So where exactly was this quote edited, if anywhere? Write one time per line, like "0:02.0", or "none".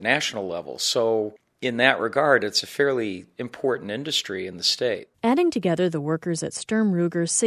0:05.1